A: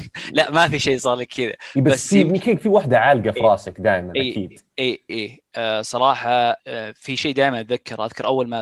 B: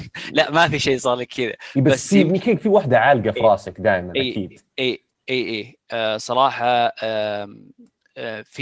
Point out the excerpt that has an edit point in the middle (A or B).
A